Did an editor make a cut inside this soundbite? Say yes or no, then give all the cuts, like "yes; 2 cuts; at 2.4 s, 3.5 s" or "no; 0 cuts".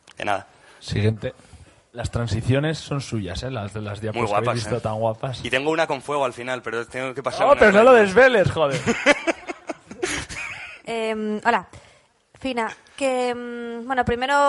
no; 0 cuts